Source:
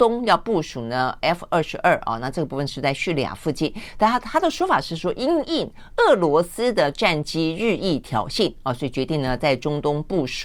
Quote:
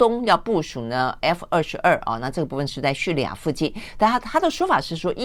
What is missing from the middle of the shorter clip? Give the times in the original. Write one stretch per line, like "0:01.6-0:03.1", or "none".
none